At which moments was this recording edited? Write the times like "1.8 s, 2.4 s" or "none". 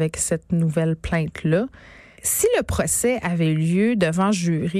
2.1 s